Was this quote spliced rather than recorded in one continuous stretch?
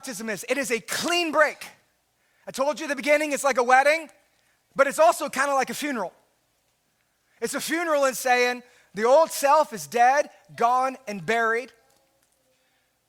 no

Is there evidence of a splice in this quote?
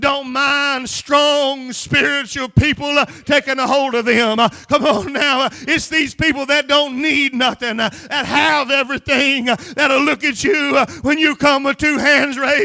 no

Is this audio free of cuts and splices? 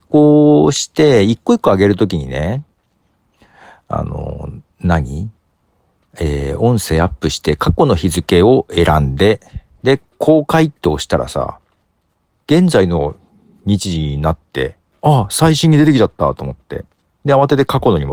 yes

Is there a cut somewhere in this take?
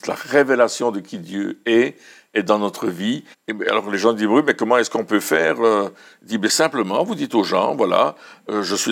yes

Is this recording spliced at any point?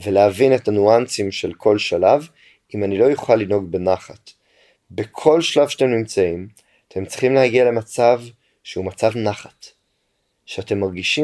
no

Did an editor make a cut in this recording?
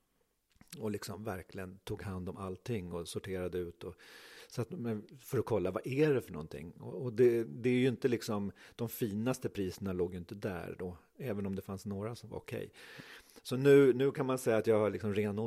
no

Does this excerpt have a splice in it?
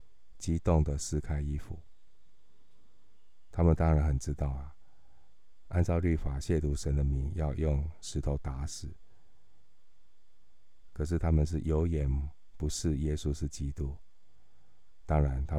yes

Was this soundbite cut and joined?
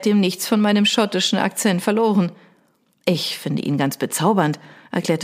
no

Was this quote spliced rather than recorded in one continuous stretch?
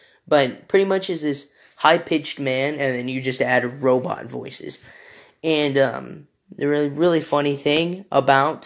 no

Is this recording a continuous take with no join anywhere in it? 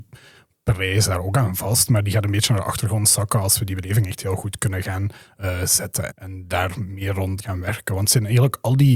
no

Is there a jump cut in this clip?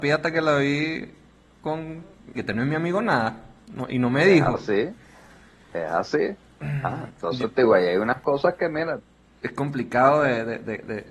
yes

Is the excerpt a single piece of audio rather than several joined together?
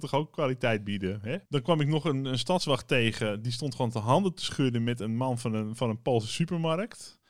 no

